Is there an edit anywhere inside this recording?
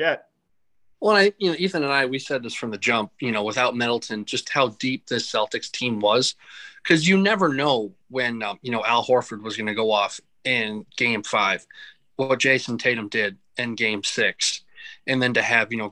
no; 0 cuts

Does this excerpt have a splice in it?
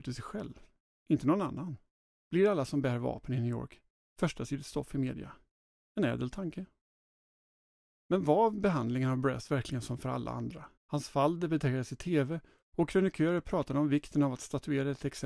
yes; 3 cuts; at 2.1 s, 5.7 s, 10.8 s

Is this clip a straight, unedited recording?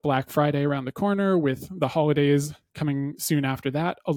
yes; 0 cuts

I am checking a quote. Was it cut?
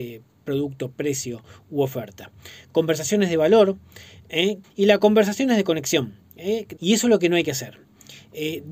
yes; 2 cuts; at 4.6 s, 6.8 s

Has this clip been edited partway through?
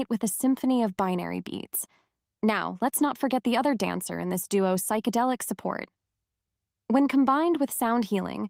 no; 0 cuts

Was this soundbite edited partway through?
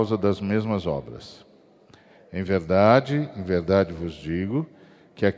no; 0 cuts

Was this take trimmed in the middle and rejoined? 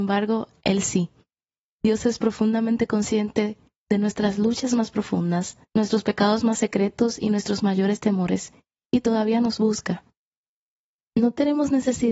yes; 1 cut; at 5.7 s

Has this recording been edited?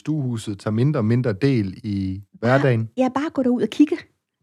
no; 0 cuts

